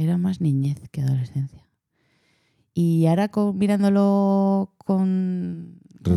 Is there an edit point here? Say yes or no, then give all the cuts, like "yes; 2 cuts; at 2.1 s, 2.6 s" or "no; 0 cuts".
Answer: no; 0 cuts